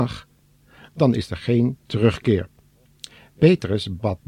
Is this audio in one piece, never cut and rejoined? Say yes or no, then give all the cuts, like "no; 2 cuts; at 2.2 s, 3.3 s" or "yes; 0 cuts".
no; 1 cut; at 3.3 s